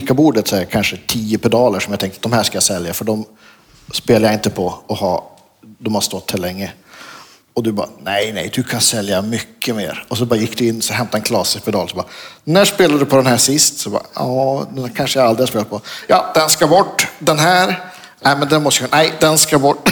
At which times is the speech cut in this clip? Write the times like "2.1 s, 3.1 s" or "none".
none